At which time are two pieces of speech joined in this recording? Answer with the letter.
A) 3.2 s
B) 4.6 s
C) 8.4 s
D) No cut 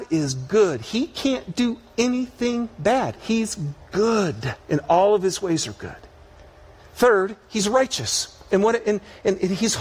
B